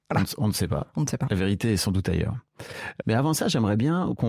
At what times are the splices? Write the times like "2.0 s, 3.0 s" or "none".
3.0 s